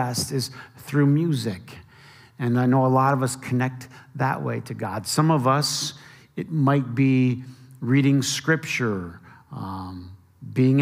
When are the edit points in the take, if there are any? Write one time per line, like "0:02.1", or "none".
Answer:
none